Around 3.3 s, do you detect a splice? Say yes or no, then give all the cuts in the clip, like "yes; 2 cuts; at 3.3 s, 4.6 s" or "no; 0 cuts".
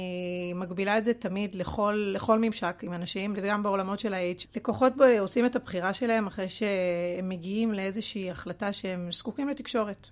yes; 2 cuts; at 3.3 s, 4.4 s